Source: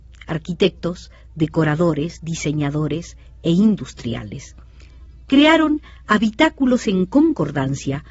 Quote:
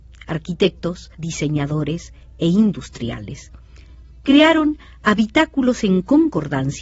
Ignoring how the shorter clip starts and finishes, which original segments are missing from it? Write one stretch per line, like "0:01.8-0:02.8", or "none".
0:01.1-0:02.2